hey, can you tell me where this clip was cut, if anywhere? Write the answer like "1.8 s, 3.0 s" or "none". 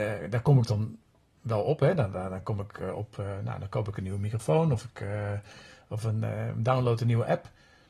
none